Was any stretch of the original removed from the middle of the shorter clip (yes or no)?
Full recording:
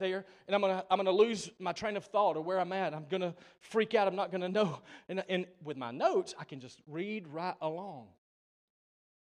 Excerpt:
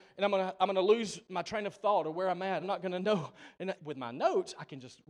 yes